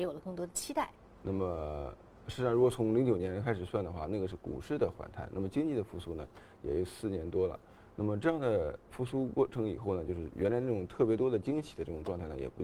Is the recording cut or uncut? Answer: cut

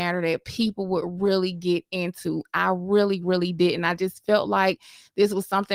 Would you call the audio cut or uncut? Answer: uncut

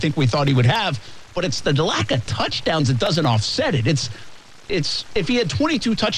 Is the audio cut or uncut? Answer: uncut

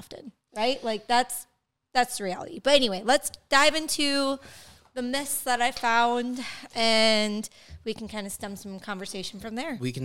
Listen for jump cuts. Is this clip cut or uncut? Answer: uncut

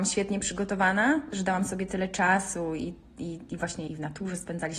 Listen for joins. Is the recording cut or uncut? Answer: cut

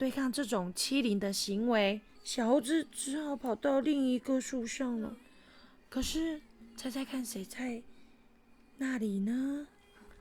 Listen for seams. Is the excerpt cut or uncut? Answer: cut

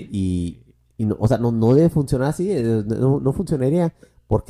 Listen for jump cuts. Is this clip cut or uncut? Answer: uncut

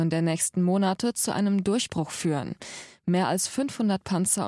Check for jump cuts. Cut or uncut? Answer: uncut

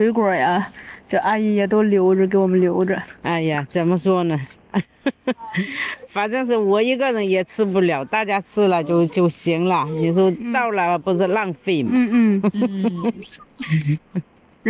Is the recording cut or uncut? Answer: uncut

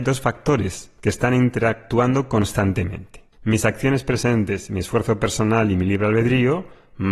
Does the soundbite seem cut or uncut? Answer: cut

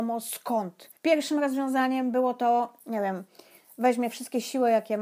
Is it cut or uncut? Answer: cut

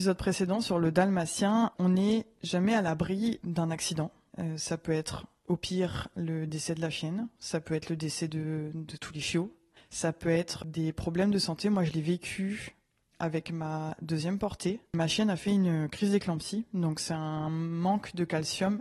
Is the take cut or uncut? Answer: uncut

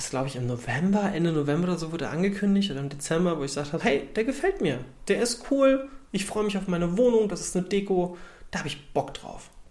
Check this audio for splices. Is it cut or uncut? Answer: cut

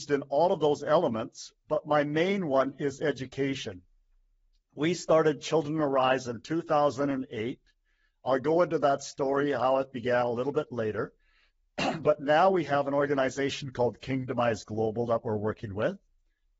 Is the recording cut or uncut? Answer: uncut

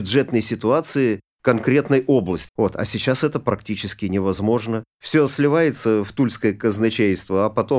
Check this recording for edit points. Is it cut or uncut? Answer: cut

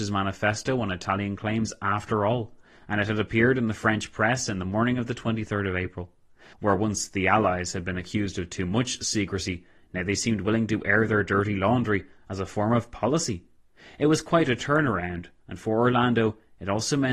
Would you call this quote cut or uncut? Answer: cut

